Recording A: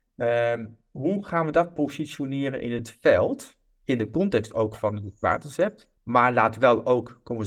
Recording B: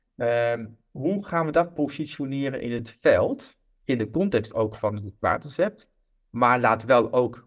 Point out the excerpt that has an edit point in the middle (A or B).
A